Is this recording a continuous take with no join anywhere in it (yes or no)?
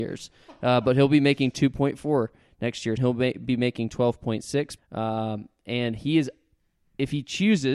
no